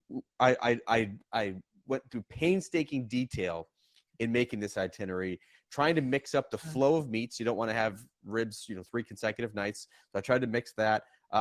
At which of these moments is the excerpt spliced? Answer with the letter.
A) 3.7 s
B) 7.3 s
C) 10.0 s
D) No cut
D